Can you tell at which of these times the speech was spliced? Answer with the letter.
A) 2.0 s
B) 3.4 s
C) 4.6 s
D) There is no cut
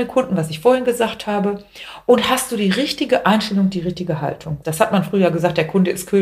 C